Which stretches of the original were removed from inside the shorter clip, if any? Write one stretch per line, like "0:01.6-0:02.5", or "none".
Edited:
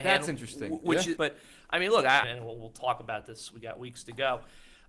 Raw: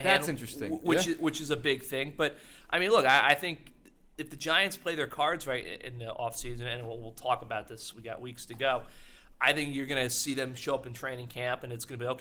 0:01.2-0:02.2
0:03.2-0:06.6